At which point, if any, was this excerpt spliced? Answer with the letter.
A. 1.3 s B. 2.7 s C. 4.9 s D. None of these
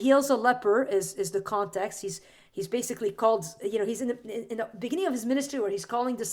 D